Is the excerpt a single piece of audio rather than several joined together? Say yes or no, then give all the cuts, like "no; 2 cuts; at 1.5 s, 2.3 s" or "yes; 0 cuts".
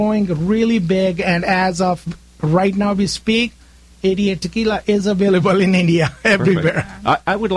yes; 0 cuts